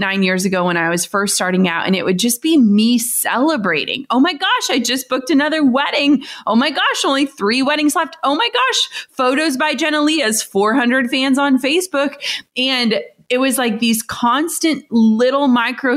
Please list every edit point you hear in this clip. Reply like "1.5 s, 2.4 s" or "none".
none